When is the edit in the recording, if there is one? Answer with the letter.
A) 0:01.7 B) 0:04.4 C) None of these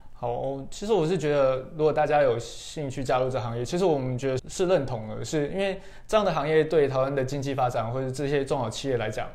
B